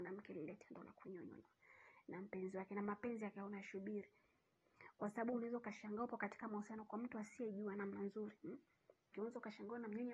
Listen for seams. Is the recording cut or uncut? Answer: cut